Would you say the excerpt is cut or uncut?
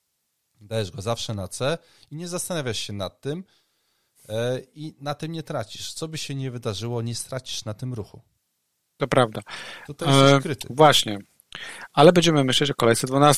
uncut